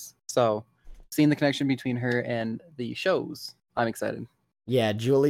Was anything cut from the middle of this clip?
no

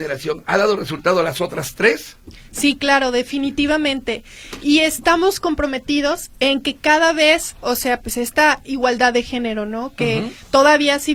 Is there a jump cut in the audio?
no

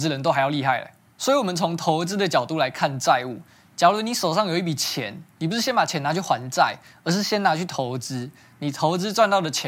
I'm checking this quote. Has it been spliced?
no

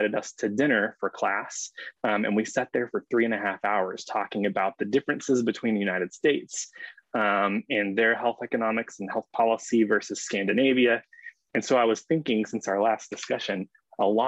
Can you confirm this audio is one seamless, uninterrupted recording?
yes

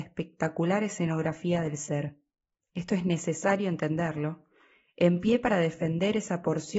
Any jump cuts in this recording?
yes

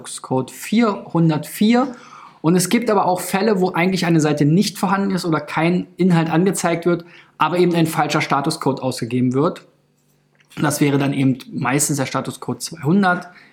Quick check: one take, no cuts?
yes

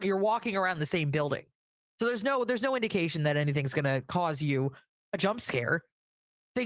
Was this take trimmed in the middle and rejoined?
no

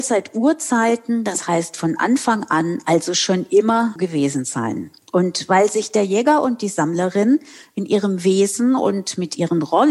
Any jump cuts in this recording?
yes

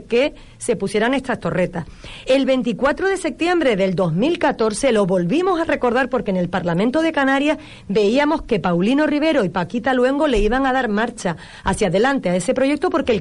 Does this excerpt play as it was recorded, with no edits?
yes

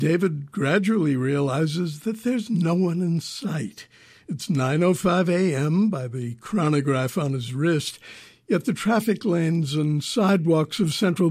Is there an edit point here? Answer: no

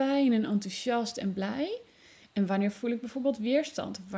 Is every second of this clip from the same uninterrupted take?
yes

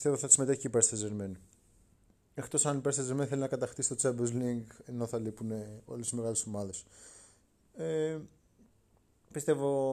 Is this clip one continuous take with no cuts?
yes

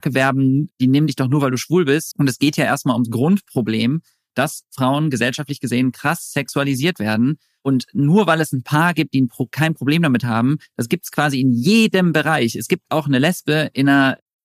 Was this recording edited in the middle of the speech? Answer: yes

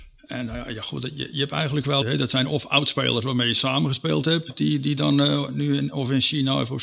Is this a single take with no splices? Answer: no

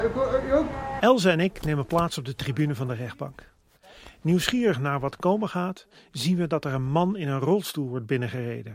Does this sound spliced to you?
yes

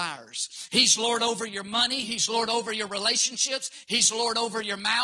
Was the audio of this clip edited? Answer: no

